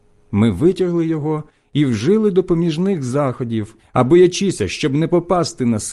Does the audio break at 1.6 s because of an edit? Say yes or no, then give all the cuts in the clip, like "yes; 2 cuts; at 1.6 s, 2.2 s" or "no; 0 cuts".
no; 1 cut; at 3.8 s